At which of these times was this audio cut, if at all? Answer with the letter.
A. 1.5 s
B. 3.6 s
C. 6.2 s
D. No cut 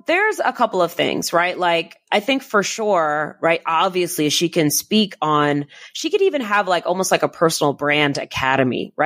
D